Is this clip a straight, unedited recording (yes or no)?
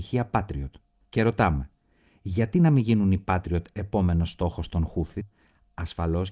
yes